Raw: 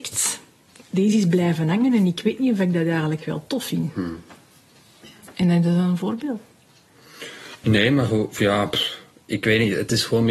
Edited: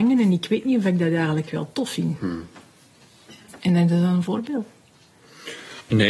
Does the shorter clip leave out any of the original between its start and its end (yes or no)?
no